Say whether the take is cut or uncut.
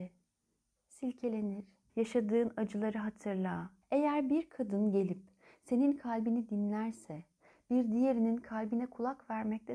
cut